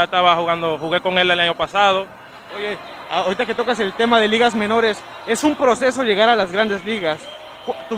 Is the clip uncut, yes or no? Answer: no